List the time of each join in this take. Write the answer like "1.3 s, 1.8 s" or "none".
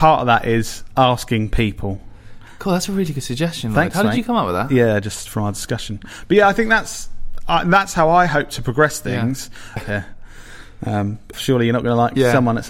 9.8 s, 11.3 s